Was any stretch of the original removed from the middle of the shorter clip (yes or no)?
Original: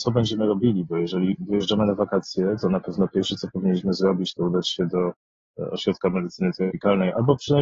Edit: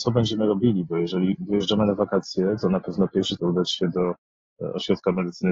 yes